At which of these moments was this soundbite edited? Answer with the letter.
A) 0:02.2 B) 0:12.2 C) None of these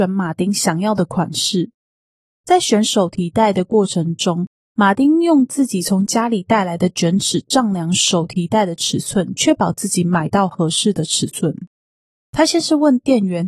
B